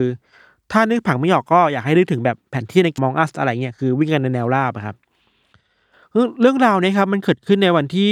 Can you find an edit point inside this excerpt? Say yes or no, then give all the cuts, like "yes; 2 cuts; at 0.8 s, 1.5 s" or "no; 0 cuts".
yes; 1 cut; at 3.0 s